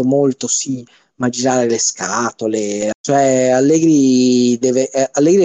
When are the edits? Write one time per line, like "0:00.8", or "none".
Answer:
0:02.9